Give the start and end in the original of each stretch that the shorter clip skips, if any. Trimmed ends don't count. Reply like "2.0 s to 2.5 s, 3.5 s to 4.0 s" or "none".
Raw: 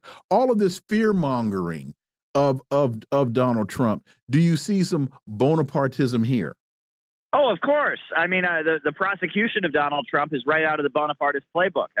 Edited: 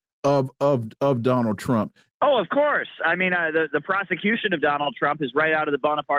4.2 s to 7.2 s